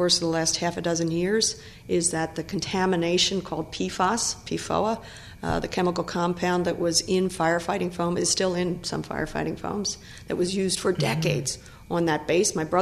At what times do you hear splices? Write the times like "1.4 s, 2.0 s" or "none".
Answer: none